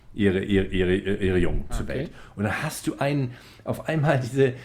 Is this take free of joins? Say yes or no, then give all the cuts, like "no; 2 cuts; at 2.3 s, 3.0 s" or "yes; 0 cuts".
no; 1 cut; at 1.7 s